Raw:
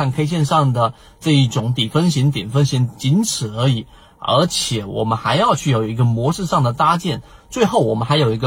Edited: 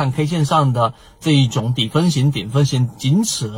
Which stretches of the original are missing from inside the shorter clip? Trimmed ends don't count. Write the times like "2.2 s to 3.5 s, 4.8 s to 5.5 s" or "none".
none